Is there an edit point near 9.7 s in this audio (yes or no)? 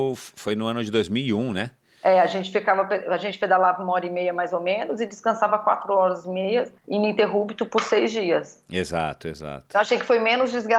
no